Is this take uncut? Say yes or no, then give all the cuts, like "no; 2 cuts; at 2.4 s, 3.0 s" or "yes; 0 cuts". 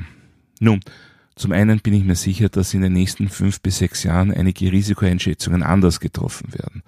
yes; 0 cuts